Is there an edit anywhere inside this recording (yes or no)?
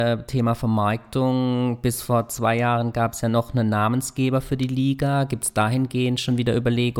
no